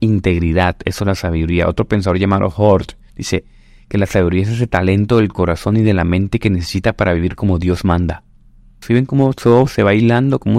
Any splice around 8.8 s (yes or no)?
yes